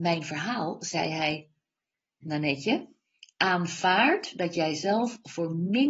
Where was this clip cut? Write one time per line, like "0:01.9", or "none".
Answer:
0:02.2